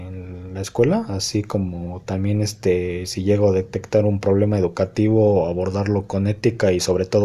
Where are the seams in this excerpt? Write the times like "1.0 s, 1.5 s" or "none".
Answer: none